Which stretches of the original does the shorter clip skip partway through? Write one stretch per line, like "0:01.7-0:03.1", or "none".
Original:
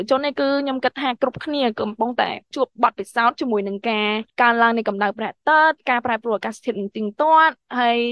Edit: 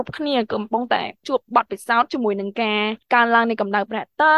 none